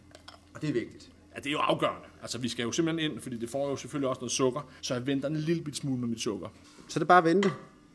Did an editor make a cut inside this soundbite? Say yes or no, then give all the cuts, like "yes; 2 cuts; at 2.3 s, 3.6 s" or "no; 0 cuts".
yes; 2 cuts; at 4.8 s, 6.6 s